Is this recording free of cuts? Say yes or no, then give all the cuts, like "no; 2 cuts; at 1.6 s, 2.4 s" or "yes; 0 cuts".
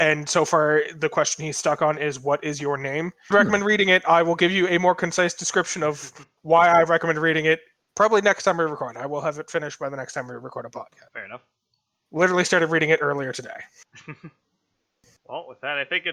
no; 1 cut; at 3.3 s